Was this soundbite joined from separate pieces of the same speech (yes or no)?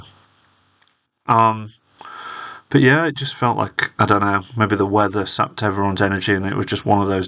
no